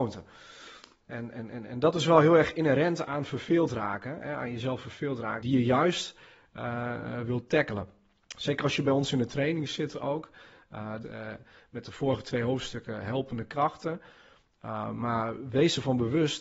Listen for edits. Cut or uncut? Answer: cut